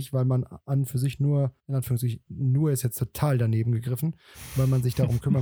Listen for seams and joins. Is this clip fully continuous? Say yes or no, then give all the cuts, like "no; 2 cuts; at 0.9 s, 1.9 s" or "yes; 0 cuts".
no; 1 cut; at 1.6 s